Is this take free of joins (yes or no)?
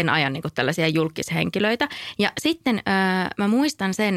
yes